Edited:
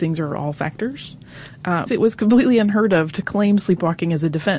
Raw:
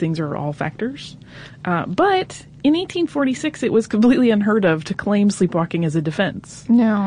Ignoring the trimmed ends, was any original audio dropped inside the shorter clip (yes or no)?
yes